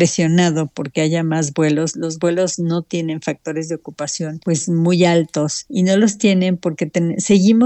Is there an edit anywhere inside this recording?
no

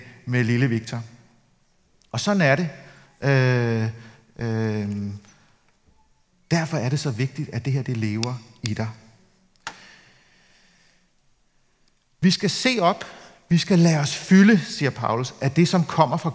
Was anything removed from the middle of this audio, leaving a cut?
no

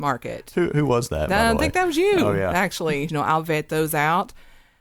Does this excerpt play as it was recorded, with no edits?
no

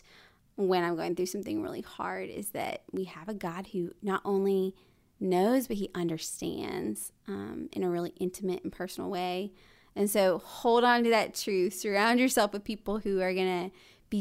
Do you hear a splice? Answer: no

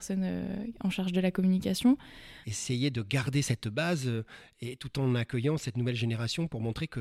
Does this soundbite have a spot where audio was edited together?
yes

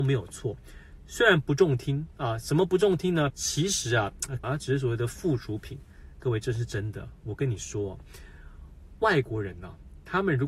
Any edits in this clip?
yes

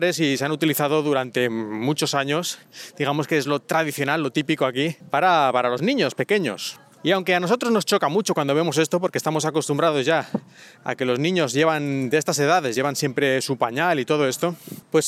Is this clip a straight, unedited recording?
yes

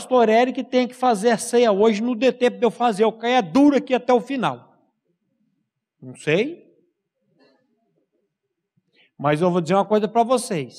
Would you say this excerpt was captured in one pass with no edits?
yes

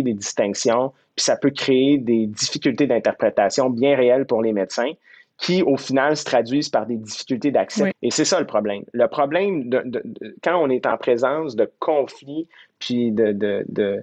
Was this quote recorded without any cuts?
no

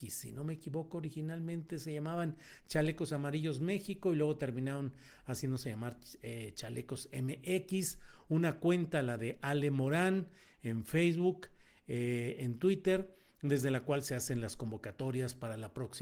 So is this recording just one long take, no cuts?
yes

